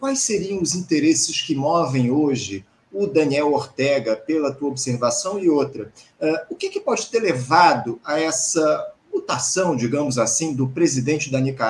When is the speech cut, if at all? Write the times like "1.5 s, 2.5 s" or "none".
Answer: none